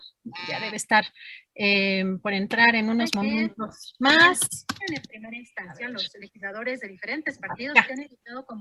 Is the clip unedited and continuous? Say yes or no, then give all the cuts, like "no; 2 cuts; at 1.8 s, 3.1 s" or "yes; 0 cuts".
yes; 0 cuts